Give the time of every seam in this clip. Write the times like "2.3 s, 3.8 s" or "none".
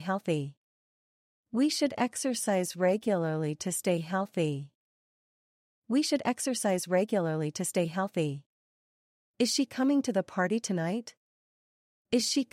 none